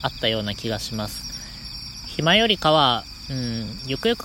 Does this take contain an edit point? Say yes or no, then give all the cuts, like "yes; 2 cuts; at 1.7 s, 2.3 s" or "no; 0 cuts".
yes; 2 cuts; at 2.0 s, 3.2 s